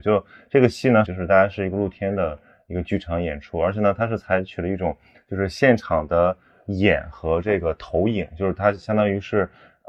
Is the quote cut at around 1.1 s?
yes; 1 cut; at 1.1 s

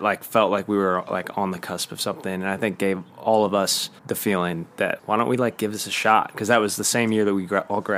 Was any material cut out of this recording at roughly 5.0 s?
yes; 2 cuts; at 4.0 s, 5.0 s

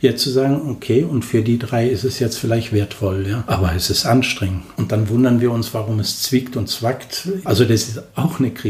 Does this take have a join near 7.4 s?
yes; 2 cuts; at 4.7 s, 7.4 s

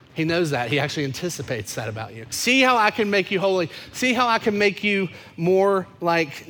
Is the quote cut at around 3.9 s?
no; 1 cut; at 2.3 s

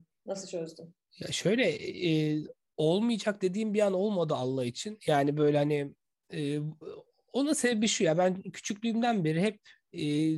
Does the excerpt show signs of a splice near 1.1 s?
no; 0 cuts

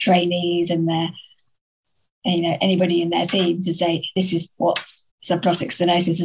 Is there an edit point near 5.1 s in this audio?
yes; 1 cut; at 5.1 s

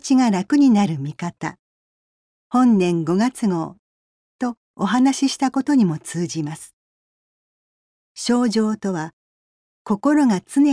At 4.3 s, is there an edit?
no; 1 cut; at 8.0 s

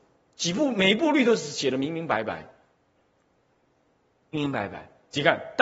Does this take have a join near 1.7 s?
no; 1 cut; at 4.3 s

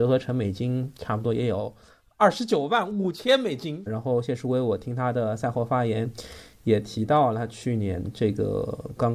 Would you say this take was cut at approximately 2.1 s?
no; 1 cut; at 3.9 s

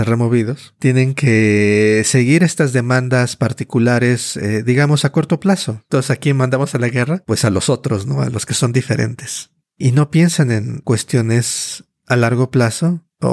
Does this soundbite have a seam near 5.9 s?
yes; 1 cut; at 5.9 s

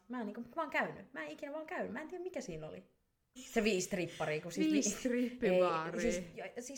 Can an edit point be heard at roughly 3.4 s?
yes; 1 cut; at 3.4 s

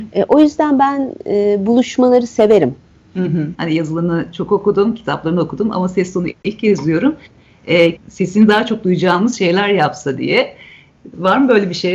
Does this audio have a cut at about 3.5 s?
yes; 2 cuts; at 3.5 s, 8.0 s

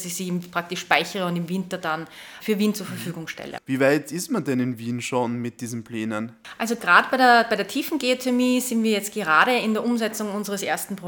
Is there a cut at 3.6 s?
yes; 1 cut; at 3.6 s

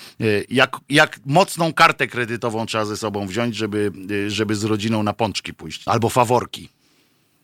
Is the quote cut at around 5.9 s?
yes; 1 cut; at 5.9 s

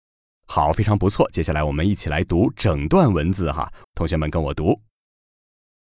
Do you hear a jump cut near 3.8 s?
yes; 1 cut; at 3.8 s

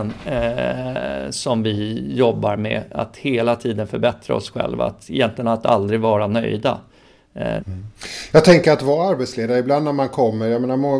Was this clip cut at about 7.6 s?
yes; 1 cut; at 7.6 s

